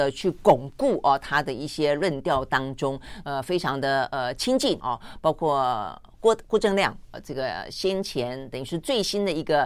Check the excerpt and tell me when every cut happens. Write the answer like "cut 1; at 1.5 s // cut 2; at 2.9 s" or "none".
cut 1; at 3.2 s // cut 2; at 4.8 s